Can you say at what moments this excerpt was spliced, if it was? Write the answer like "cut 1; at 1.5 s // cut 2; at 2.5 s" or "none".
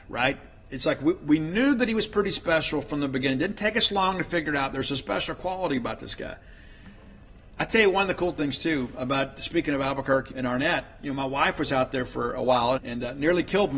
cut 1; at 10.3 s // cut 2; at 12.8 s